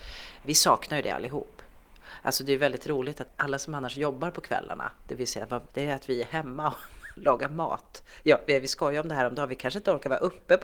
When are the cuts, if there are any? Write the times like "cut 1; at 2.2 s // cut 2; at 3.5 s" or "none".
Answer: cut 1; at 5.7 s